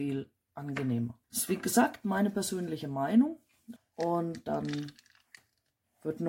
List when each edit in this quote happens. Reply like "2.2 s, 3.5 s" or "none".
1.2 s, 3.8 s